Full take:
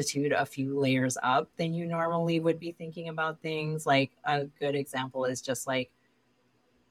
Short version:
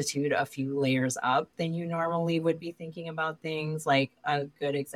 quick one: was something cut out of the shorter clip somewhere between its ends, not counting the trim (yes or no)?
no